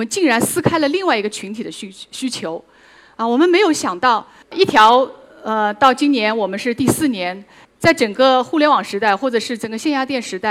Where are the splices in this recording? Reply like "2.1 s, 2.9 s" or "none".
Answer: 4.4 s, 7.6 s